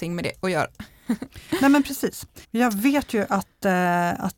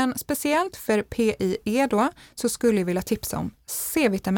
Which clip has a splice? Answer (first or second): first